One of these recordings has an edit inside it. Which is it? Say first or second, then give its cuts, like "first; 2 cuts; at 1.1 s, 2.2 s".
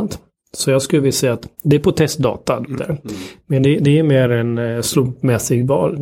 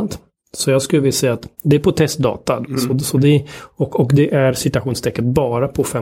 first; 1 cut; at 2.8 s